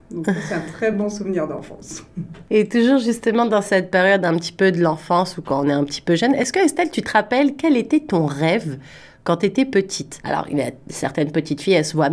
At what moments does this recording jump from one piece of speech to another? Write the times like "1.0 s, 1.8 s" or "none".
none